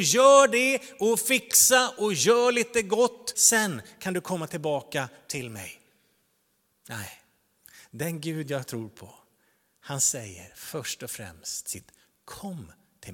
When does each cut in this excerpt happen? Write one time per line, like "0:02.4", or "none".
0:03.3